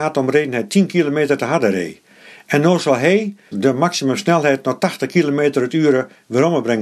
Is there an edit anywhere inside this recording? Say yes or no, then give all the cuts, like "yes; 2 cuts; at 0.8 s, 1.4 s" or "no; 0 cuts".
yes; 1 cut; at 3.5 s